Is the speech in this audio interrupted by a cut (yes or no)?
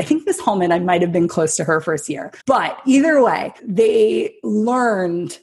yes